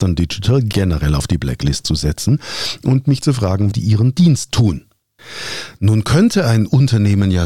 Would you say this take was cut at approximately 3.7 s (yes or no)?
yes